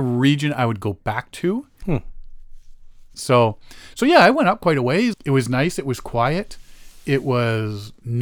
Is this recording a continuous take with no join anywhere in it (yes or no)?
no